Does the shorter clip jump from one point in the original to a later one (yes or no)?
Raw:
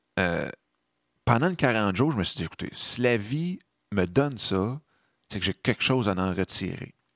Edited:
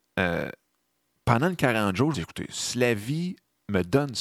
yes